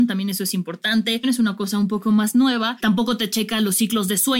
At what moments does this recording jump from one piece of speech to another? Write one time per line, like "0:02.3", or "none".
0:01.2
0:02.8